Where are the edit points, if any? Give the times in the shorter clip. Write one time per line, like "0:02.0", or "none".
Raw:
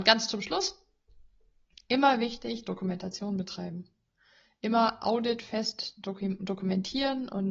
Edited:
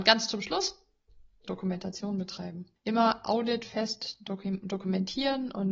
0:01.4
0:02.8